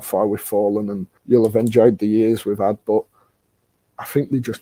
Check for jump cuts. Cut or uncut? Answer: cut